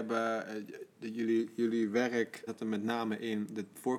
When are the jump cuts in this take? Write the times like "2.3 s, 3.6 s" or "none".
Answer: 2.5 s